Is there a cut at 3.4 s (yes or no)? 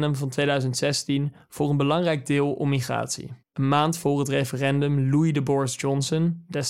yes